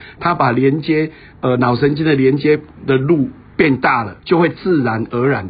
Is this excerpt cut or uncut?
cut